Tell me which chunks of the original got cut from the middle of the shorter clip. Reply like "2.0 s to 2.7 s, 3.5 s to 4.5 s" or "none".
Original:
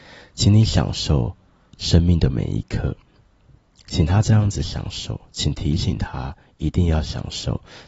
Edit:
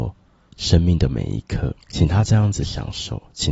3.0 s to 3.8 s